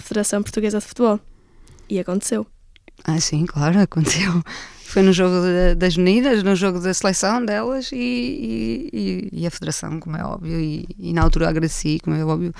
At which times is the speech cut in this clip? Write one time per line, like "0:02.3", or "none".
none

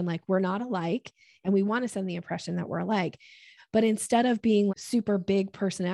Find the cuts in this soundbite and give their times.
0:03.6
0:04.7

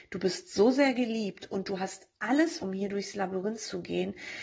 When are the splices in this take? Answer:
0:02.6

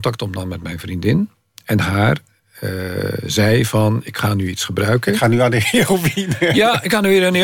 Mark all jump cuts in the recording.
none

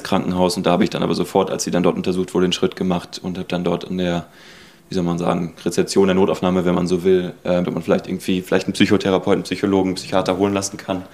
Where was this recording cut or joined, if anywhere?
0:07.6

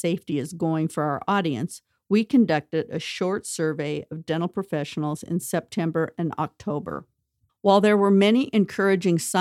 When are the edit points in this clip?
0:07.5

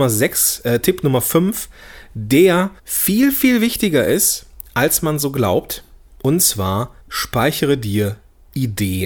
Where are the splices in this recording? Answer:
0:02.8
0:07.0

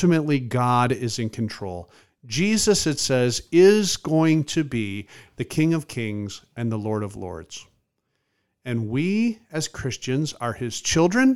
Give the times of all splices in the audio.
none

